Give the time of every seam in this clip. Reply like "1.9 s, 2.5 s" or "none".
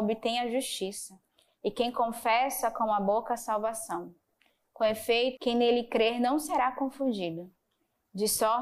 5.3 s